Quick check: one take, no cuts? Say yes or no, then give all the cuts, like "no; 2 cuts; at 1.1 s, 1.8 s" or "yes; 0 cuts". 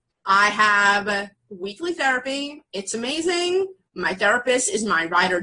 yes; 0 cuts